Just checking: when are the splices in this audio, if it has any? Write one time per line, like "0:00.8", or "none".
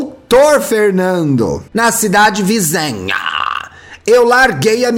0:01.7